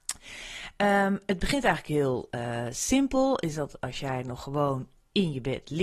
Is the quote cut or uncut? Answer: uncut